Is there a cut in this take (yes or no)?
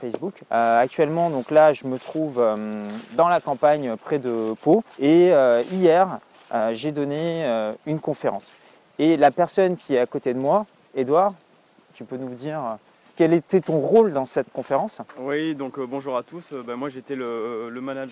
yes